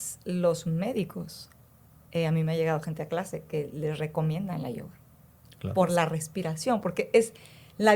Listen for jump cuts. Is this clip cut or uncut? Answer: uncut